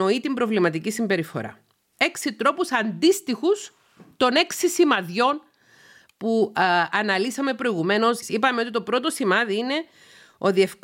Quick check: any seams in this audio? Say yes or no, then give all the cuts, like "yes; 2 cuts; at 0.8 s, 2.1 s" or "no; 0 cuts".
yes; 2 cuts; at 1.9 s, 8.2 s